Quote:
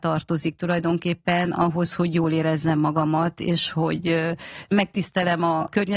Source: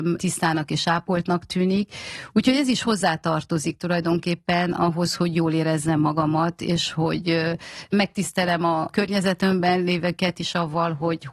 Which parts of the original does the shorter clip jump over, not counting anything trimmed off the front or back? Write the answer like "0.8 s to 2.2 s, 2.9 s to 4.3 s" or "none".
none